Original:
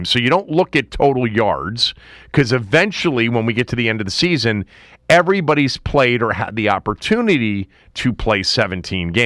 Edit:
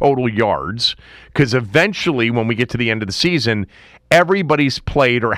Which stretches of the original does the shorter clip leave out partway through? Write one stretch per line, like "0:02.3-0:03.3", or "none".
none